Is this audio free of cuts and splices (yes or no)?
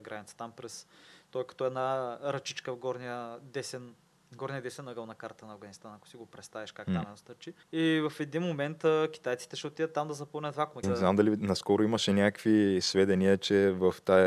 no